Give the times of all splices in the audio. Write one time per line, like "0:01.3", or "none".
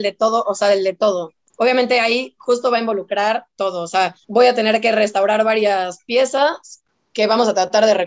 0:04.2